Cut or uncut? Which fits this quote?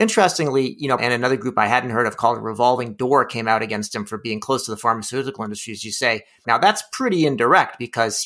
cut